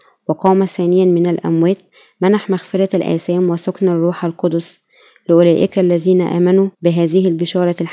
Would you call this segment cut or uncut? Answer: cut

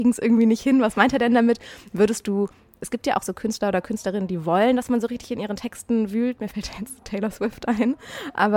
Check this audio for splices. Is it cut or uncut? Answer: uncut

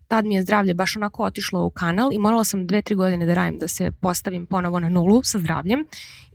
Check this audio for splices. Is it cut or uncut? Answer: uncut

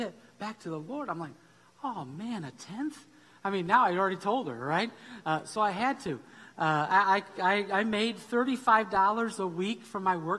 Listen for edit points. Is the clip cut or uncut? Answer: uncut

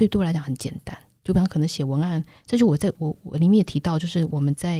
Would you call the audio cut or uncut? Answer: uncut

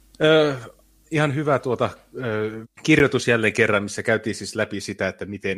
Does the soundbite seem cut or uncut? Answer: cut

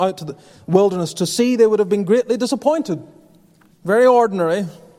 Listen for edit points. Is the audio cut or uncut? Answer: cut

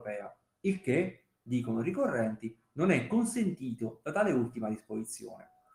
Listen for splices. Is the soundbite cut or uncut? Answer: uncut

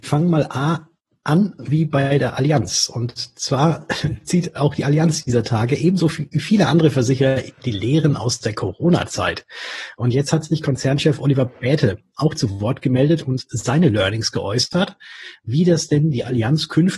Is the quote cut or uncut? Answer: uncut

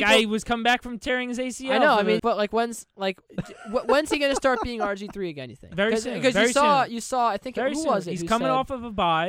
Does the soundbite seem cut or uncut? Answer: cut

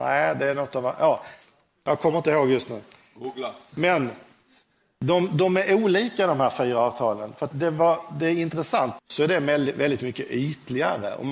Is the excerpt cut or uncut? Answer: cut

